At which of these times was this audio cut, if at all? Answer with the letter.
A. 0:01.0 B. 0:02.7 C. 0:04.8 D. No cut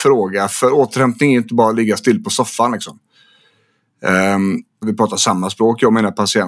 C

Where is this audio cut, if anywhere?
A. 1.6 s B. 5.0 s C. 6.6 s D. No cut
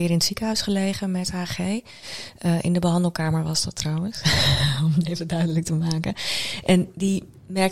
D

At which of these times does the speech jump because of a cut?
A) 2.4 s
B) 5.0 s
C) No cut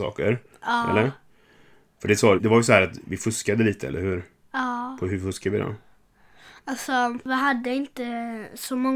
A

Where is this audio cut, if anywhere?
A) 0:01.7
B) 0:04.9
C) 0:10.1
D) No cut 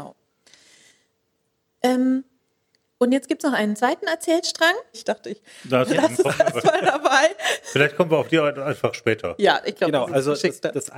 B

